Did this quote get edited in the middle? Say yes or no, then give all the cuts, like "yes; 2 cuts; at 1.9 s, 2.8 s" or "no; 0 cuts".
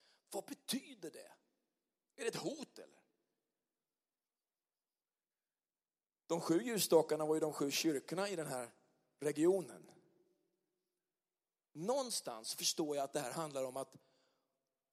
no; 0 cuts